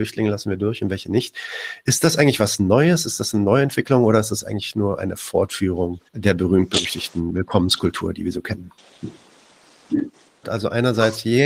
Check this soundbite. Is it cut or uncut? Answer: cut